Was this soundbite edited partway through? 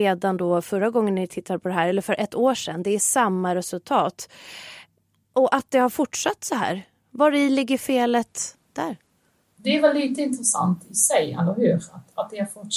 no; 0 cuts

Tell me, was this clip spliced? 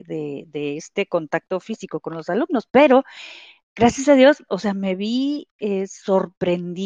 no; 0 cuts

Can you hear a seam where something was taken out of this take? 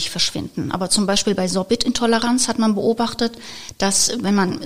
no; 0 cuts

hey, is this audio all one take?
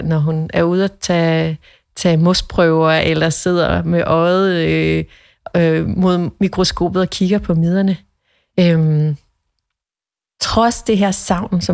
yes; 0 cuts

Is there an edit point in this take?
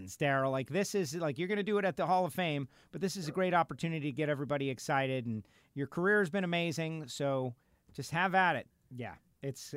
yes; 1 cut; at 8.7 s

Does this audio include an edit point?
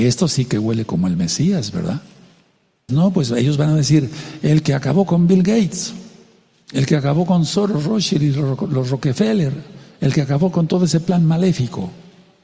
yes; 1 cut; at 2.9 s

